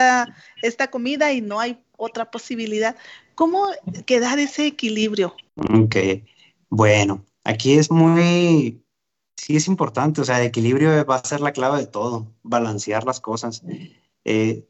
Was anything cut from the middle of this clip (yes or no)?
yes